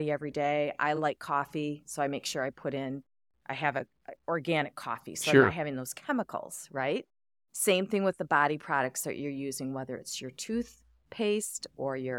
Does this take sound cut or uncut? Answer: uncut